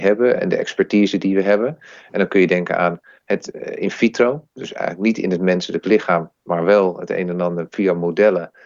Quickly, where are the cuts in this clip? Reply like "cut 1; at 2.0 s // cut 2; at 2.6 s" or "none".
none